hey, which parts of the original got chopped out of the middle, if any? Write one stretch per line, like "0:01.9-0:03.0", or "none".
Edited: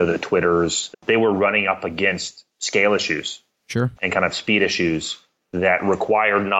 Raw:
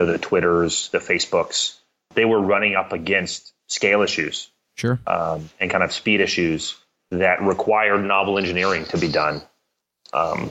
0:00.9-0:02.0
0:05.0-0:05.5